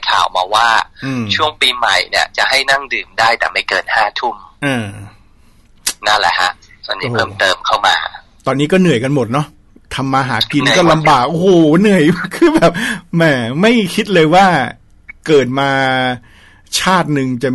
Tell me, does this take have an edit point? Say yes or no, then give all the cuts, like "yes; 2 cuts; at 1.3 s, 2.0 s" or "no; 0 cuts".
no; 0 cuts